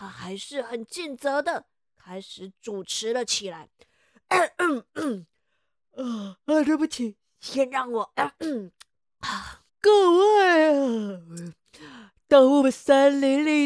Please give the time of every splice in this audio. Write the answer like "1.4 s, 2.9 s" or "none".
9.7 s